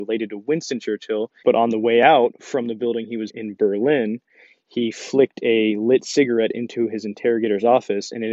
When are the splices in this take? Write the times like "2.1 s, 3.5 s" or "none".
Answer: 1.4 s, 3.3 s

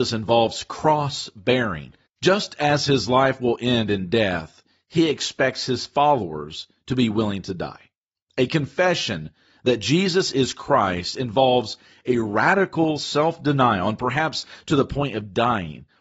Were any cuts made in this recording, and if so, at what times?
2.1 s

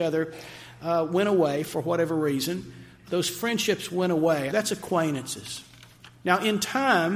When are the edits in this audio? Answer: 3.1 s, 4.5 s

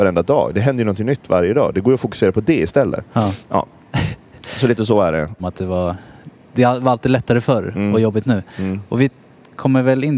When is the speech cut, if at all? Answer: 5.4 s

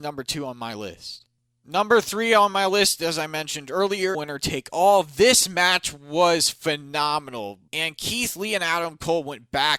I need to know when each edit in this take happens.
4.1 s, 7.7 s

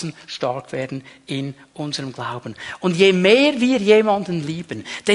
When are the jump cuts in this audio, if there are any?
none

